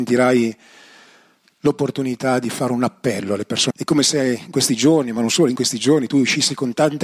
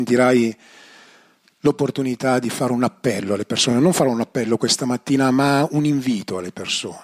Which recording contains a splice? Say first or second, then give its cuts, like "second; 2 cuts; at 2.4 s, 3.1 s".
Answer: first; 1 cut; at 3.7 s